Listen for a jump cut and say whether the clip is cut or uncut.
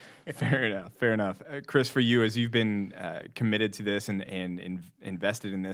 uncut